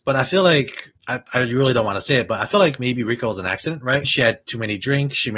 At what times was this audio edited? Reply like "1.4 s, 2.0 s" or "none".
1.0 s, 4.0 s